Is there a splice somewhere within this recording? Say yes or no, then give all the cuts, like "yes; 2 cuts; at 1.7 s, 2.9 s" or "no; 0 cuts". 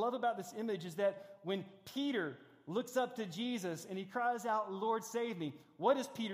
no; 0 cuts